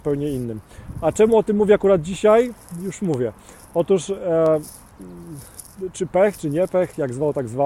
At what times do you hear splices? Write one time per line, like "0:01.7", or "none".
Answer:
none